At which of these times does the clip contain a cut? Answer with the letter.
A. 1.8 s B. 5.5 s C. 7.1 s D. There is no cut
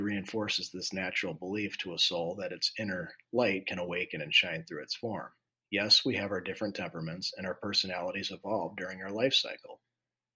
B